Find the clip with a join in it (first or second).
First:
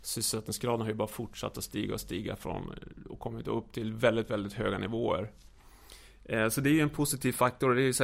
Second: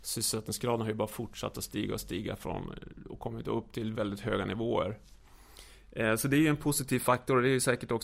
second